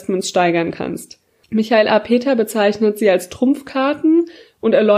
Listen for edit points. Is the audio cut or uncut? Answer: cut